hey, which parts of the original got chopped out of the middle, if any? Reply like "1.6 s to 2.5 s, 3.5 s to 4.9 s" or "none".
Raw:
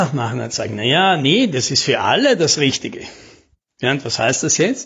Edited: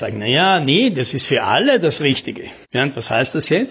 3.2 s to 3.7 s